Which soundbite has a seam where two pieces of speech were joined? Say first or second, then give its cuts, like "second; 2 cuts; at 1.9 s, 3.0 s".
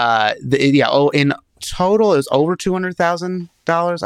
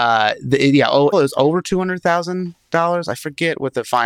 second; 1 cut; at 1.1 s